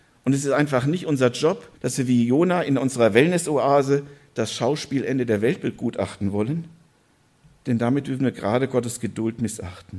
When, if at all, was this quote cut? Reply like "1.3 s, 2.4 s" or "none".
1.8 s